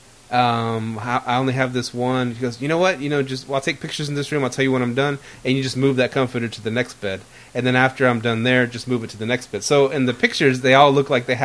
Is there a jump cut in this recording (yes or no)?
no